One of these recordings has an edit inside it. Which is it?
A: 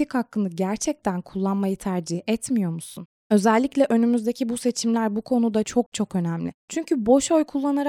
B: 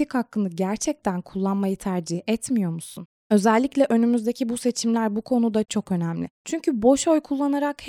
B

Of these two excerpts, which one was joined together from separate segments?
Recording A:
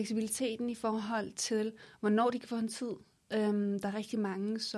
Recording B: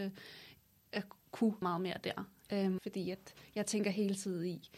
B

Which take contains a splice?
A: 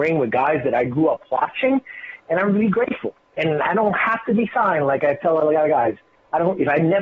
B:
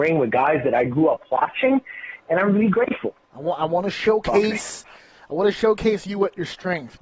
B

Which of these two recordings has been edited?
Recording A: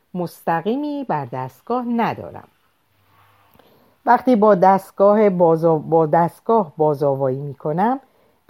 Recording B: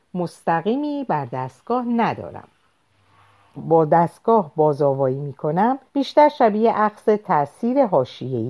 B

